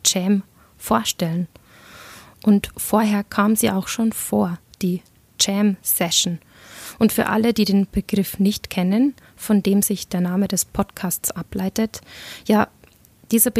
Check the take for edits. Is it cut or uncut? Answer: uncut